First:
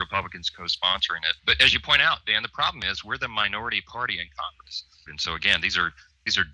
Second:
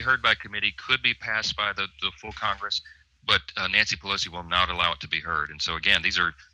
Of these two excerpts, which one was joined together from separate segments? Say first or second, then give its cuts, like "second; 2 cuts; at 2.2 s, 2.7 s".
first; 2 cuts; at 1.4 s, 5.1 s